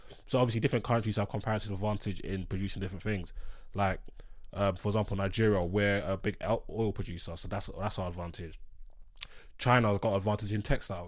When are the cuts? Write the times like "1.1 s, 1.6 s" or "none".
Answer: none